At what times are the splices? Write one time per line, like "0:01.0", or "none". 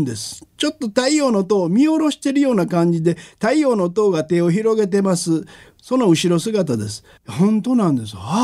0:07.2